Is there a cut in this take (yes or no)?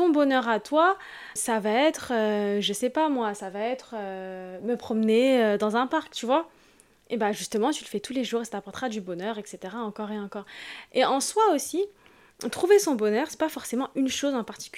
yes